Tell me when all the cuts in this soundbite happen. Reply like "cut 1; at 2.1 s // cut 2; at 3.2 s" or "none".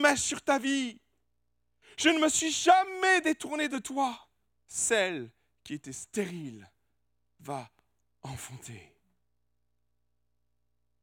cut 1; at 4.6 s